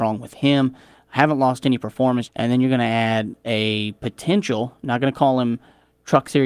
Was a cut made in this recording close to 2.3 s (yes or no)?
yes